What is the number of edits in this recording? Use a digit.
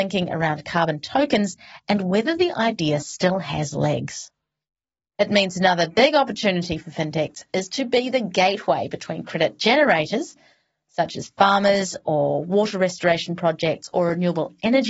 1